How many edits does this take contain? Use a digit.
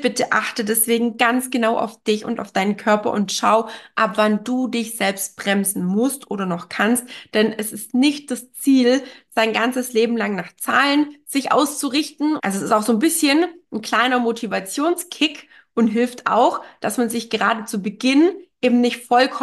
1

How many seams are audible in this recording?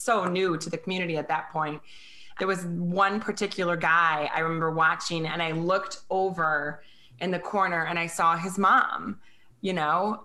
1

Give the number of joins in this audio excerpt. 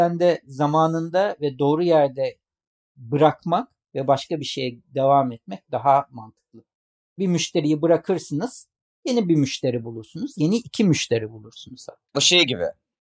1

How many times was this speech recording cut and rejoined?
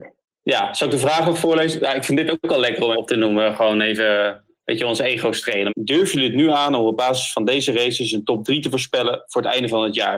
2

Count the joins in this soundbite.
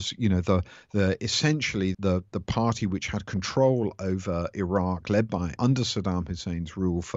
2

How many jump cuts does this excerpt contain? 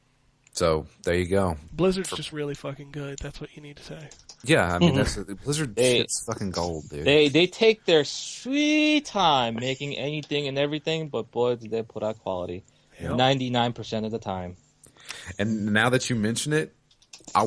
0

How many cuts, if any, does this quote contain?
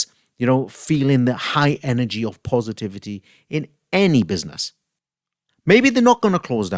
1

